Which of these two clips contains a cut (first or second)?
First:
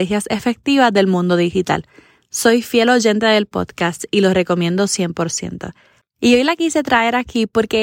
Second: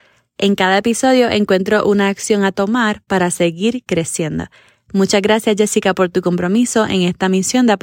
first